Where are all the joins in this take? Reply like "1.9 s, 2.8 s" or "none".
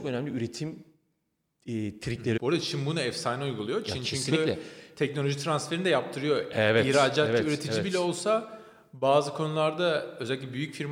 2.4 s